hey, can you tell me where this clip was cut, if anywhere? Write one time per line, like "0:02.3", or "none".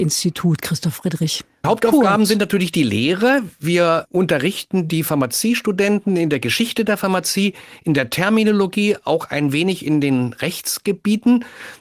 0:01.6